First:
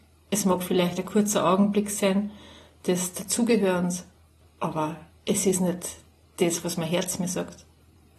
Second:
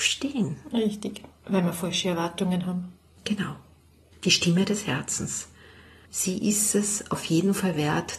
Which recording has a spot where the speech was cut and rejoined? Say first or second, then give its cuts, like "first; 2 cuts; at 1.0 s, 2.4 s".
second; 1 cut; at 1.4 s